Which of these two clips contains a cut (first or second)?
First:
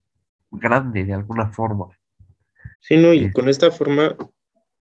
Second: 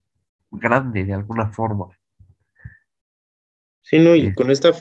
first